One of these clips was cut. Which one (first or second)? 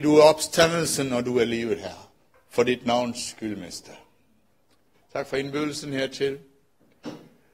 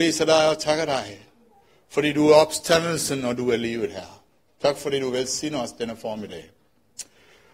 first